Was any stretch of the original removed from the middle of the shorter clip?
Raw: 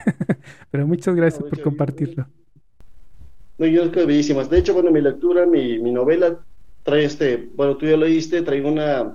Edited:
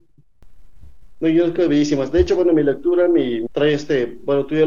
yes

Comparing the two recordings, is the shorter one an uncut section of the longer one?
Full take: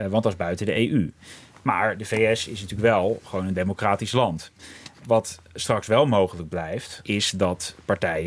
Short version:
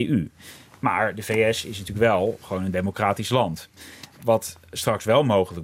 yes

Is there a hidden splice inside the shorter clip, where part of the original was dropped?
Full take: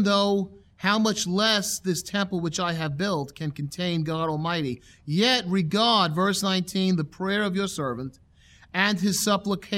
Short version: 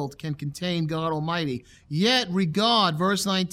no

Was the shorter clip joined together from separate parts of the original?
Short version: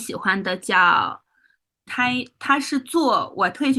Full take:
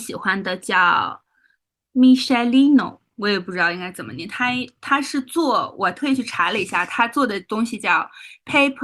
yes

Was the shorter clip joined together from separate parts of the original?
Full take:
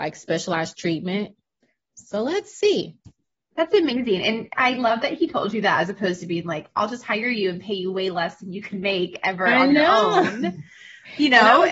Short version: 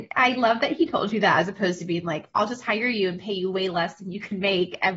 no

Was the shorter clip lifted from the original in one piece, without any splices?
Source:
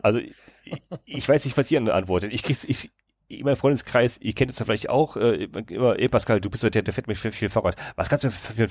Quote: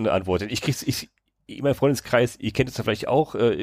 yes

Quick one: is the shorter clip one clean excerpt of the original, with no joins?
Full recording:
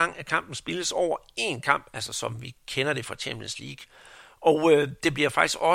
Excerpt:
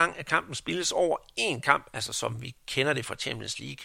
yes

